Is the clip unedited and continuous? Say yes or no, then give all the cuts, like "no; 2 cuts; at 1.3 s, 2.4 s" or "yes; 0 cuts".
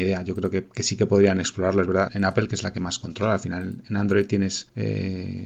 no; 1 cut; at 2.1 s